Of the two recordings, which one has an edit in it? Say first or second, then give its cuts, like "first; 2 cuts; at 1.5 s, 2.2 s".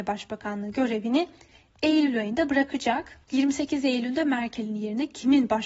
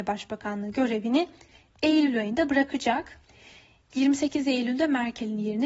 first; 1 cut; at 3.2 s